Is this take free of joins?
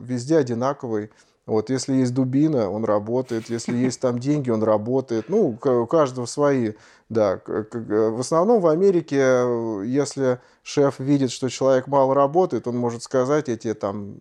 yes; 0 cuts

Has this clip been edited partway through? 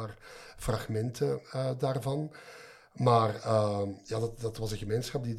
no; 0 cuts

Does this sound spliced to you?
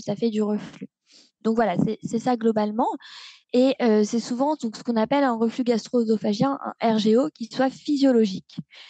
no; 0 cuts

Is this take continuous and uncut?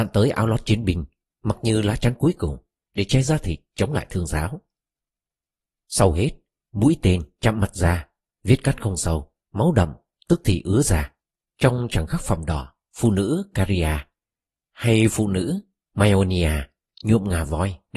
no; 2 cuts; at 5.8 s, 9.4 s

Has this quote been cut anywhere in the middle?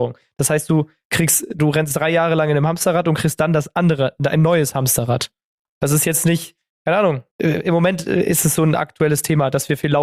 yes; 2 cuts; at 5.7 s, 7.3 s

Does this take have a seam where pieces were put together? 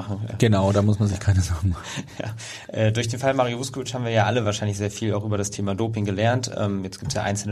no; 0 cuts

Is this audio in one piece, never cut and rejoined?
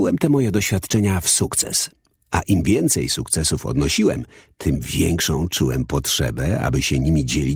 yes; 0 cuts

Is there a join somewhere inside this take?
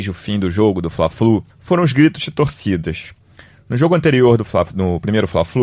yes; 1 cut; at 1.5 s

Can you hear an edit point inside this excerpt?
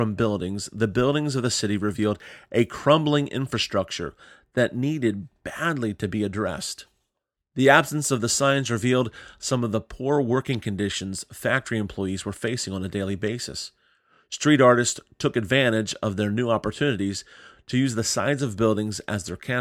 no; 0 cuts

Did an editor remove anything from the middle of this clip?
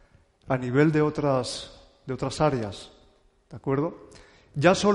no; 0 cuts

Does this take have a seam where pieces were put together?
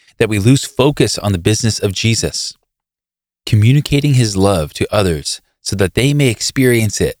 no; 0 cuts

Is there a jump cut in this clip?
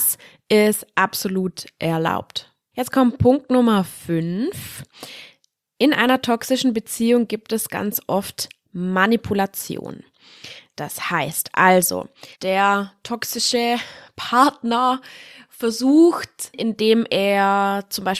yes; 3 cuts; at 2.7 s, 12.3 s, 16.5 s

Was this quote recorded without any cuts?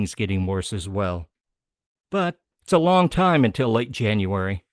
no; 1 cut; at 2.5 s

